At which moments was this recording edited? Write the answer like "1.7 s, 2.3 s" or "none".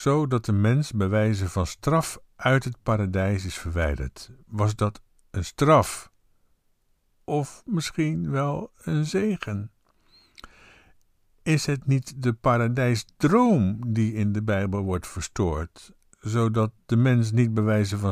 none